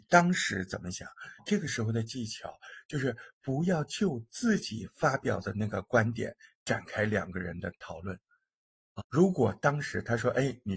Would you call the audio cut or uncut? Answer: cut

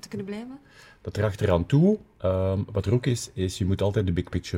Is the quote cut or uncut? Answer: uncut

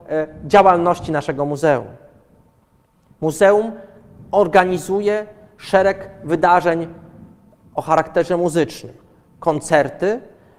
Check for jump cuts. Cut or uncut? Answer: uncut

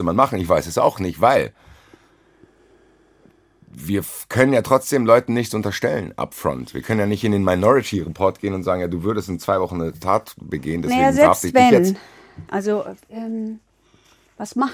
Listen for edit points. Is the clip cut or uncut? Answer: cut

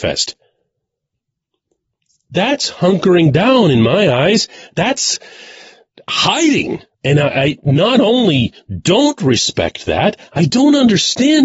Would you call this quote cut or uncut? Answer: cut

